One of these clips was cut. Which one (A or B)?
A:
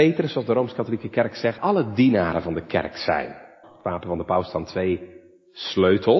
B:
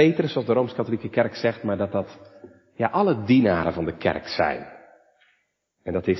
A